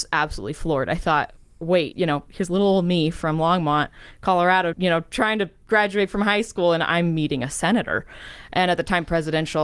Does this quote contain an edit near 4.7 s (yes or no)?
yes